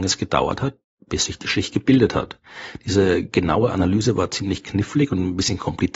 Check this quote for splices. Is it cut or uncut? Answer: uncut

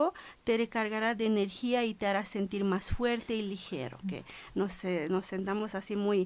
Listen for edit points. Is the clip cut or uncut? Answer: cut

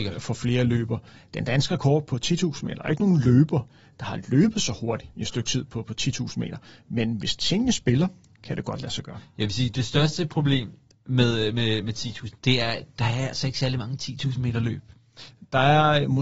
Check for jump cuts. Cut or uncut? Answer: uncut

